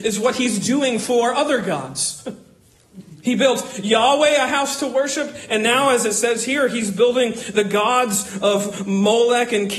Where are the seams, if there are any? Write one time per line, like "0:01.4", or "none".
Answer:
none